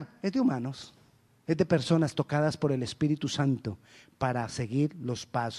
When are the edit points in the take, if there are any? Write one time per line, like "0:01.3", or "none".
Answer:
0:01.5